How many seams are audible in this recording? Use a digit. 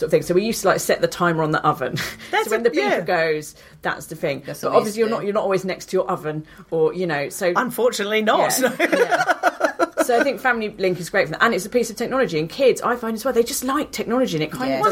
0